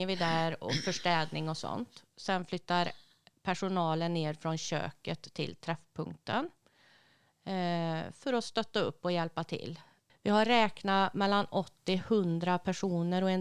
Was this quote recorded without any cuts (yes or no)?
no